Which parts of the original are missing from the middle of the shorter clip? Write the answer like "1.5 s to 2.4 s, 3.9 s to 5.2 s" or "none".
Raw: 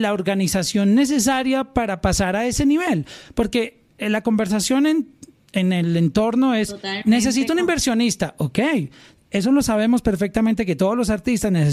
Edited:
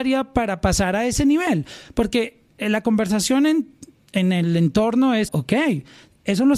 6.7 s to 8.3 s